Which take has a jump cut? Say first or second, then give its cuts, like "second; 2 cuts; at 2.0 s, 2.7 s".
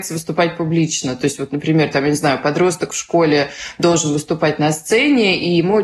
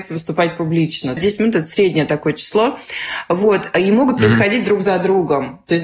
second; 1 cut; at 1.2 s